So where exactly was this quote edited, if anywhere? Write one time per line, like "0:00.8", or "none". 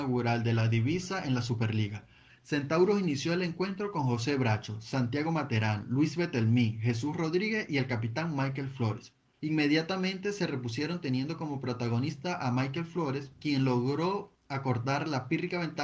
0:02.3
0:09.4